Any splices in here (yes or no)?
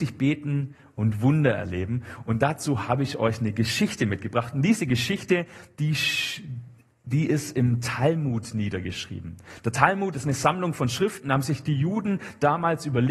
no